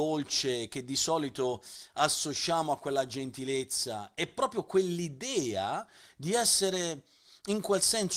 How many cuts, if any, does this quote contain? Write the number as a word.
zero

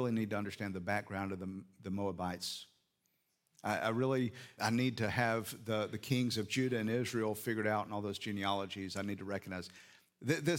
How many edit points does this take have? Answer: one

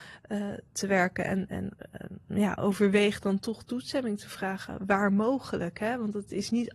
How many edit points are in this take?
one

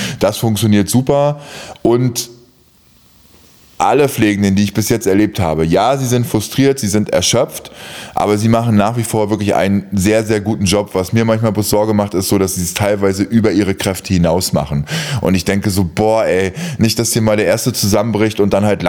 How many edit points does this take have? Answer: zero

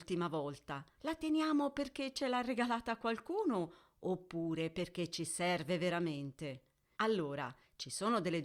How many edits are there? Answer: two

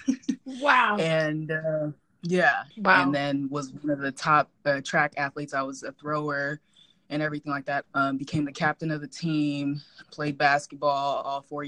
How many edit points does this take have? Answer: three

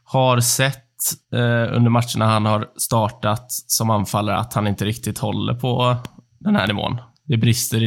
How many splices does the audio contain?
one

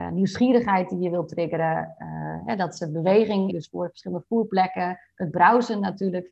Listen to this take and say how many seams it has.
one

